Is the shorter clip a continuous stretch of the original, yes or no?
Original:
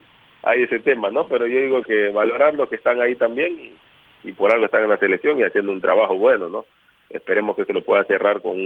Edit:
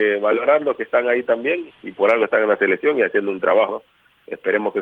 no